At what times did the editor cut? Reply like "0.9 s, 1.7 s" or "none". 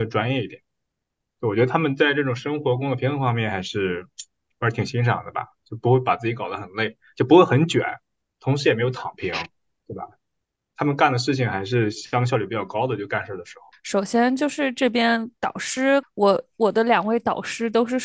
13.7 s, 16.0 s